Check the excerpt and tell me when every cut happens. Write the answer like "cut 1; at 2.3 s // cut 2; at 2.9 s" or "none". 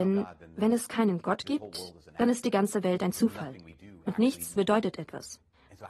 cut 1; at 4.6 s